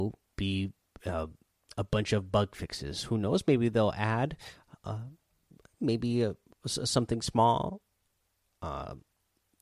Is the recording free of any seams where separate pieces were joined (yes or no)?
yes